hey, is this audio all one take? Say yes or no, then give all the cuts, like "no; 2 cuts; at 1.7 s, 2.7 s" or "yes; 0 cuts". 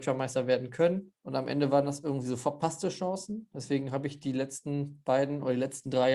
no; 1 cut; at 1.2 s